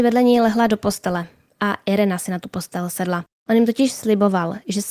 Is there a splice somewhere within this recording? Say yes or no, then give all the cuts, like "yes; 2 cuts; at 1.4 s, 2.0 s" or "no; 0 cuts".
yes; 1 cut; at 3.4 s